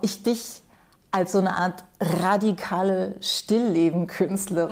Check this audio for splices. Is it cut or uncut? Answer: uncut